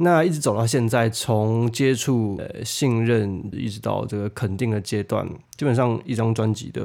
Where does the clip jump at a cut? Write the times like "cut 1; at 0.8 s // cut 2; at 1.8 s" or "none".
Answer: cut 1; at 2.4 s // cut 2; at 3.5 s // cut 3; at 5.5 s